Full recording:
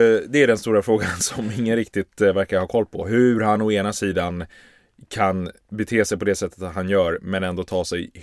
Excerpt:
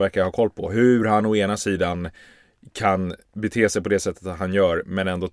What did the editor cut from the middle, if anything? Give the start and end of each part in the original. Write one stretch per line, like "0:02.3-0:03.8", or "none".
none